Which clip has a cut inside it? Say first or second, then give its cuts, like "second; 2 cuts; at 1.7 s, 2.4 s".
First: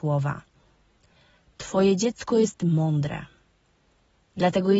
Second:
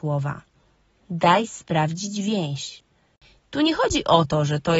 second; 2 cuts; at 1.0 s, 3.4 s